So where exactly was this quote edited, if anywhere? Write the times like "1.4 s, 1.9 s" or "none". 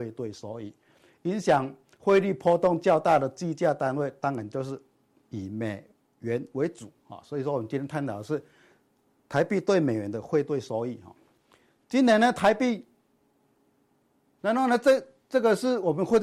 14.4 s